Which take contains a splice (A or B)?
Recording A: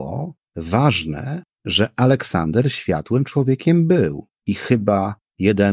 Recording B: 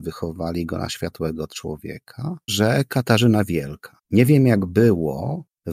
B